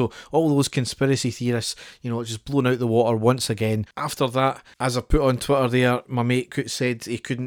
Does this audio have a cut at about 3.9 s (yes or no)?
yes